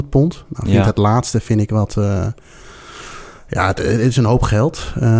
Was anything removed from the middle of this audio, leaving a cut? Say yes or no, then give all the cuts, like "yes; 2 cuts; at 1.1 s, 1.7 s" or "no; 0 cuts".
no; 0 cuts